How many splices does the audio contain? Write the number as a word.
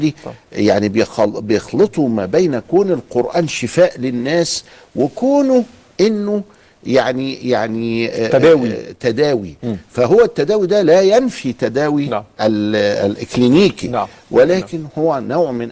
zero